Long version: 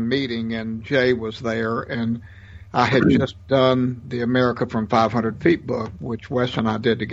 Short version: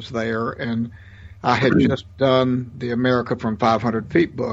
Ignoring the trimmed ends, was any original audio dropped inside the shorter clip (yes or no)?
no